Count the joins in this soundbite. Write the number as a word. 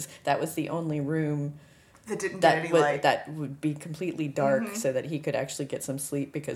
zero